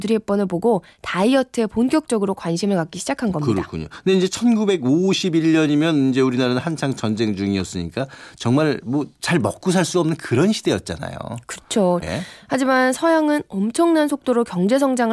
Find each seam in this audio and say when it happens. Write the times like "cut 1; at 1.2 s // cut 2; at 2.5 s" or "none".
cut 1; at 12.0 s